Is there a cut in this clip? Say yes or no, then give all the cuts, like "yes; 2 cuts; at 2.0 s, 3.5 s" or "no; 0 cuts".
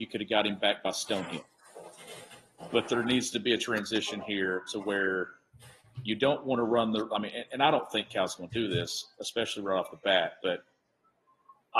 no; 0 cuts